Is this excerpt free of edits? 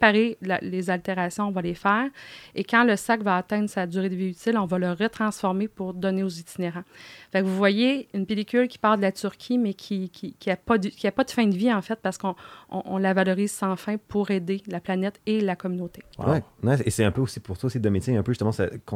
no; 1 cut; at 16.1 s

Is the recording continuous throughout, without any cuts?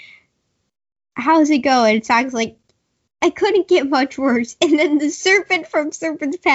yes; 0 cuts

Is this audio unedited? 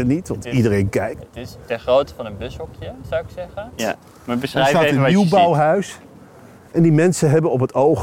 no; 1 cut; at 3.8 s

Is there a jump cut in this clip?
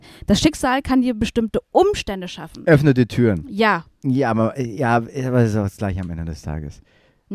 yes; 1 cut; at 3.9 s

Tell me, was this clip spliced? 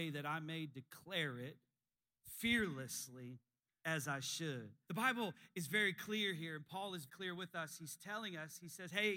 yes; 2 cuts; at 4.9 s, 7.1 s

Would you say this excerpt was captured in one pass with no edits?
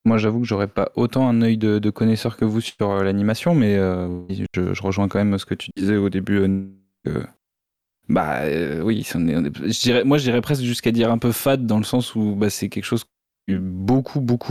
yes; 0 cuts

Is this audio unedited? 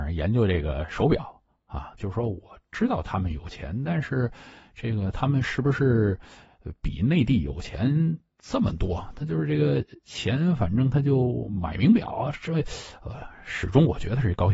no; 1 cut; at 2.0 s

